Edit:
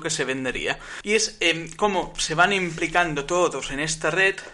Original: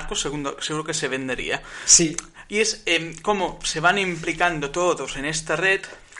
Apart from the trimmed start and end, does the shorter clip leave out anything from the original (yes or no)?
yes